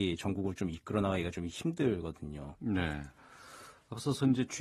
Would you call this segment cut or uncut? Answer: cut